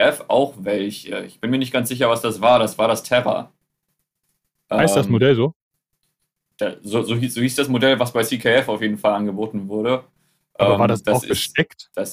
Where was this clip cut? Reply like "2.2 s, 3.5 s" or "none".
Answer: none